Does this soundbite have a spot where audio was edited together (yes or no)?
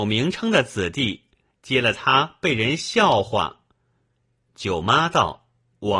no